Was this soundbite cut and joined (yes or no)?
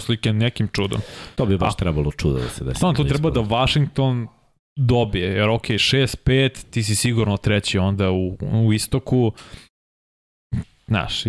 no